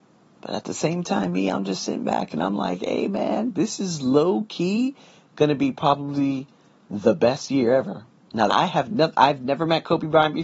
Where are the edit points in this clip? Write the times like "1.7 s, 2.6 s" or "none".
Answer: 8.5 s